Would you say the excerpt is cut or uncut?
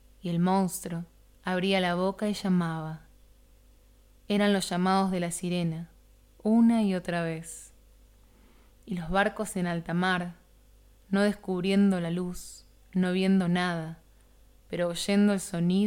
uncut